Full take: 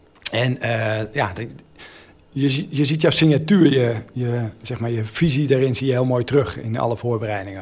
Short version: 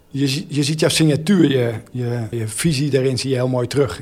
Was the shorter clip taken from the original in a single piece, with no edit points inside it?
no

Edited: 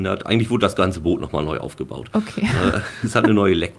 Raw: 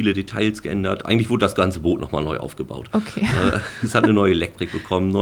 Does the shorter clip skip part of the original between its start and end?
no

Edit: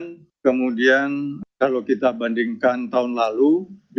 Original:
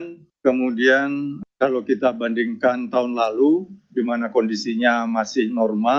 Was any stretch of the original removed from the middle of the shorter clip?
no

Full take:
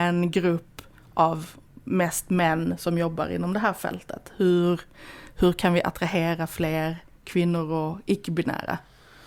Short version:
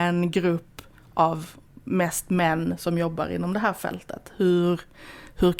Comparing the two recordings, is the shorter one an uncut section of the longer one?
yes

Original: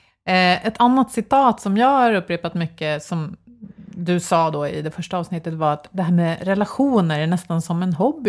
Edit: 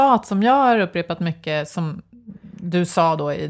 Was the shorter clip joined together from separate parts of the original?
no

